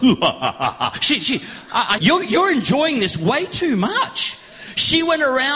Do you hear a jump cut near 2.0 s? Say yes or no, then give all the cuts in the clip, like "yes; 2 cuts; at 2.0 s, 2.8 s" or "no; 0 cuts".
yes; 1 cut; at 2.0 s